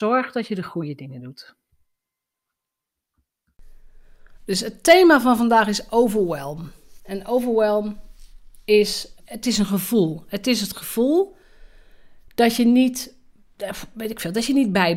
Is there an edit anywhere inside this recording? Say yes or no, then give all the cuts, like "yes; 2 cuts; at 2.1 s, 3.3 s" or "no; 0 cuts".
yes; 1 cut; at 9.2 s